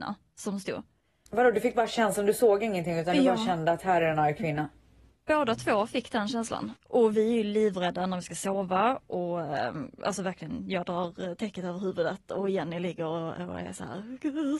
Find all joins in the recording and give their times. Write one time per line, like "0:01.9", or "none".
0:06.8

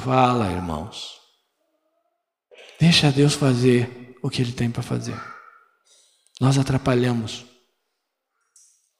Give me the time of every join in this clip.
none

